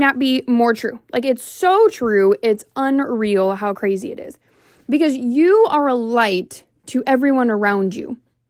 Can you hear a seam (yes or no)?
no